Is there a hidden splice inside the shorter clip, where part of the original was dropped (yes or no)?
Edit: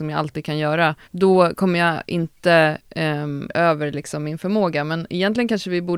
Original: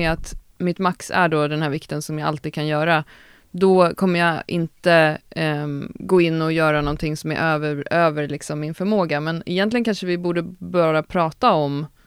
yes